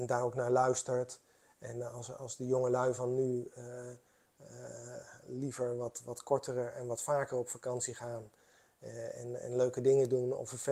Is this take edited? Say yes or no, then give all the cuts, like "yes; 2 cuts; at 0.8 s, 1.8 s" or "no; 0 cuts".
no; 0 cuts